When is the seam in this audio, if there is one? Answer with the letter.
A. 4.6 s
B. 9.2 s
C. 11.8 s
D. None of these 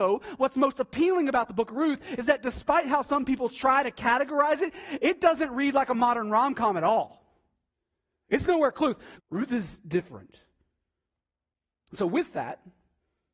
B